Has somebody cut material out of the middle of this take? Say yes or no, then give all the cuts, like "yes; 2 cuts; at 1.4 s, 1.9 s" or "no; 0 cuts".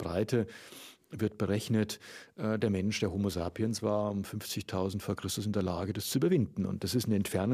no; 0 cuts